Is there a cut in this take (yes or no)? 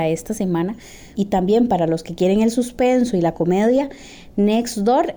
yes